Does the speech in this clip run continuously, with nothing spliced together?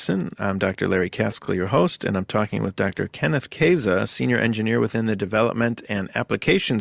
yes; 0 cuts

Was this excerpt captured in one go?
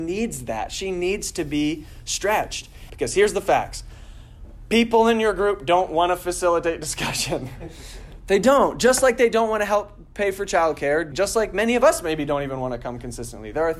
no; 2 cuts; at 2.9 s, 11.1 s

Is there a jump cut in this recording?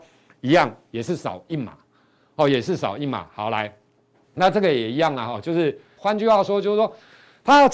yes; 1 cut; at 6.0 s

